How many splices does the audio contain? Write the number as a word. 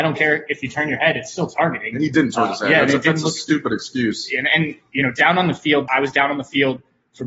one